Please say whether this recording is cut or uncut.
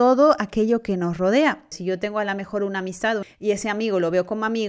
cut